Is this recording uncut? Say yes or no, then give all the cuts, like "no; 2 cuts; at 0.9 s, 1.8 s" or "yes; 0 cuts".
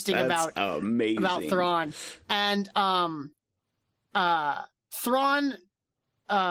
yes; 0 cuts